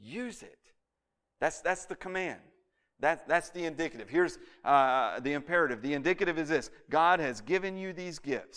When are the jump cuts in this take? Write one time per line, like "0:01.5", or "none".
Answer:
none